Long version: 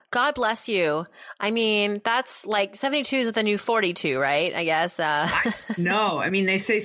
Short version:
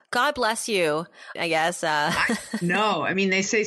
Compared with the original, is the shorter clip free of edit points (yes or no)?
no